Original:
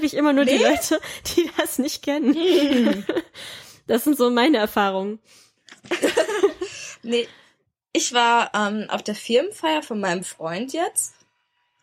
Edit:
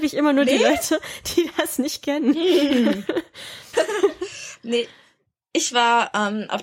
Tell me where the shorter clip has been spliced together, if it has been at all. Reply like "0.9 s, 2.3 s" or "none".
3.7 s